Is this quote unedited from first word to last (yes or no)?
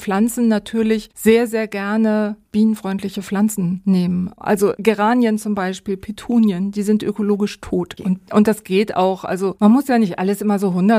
no